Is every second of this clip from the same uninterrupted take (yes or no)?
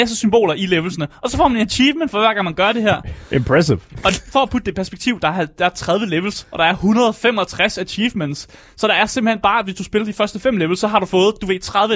yes